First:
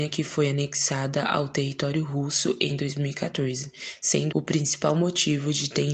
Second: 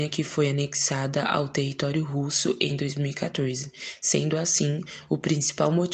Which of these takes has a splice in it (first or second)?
first